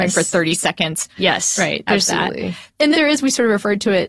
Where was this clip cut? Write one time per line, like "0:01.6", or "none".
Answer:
0:01.1
0:02.9